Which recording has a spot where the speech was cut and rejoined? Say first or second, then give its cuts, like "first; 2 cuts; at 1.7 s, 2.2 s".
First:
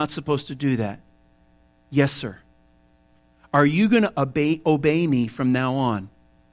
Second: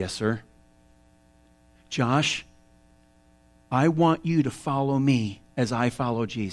second; 1 cut; at 5.5 s